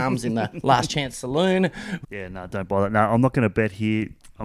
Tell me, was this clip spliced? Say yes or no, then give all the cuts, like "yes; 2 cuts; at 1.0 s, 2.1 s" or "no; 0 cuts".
yes; 1 cut; at 2.0 s